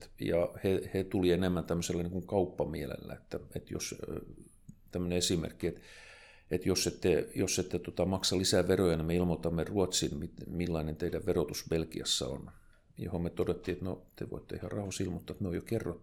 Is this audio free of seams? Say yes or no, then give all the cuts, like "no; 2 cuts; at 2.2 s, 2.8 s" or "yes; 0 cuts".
yes; 0 cuts